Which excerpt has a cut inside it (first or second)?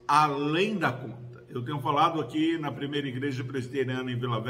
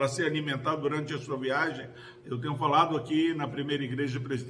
second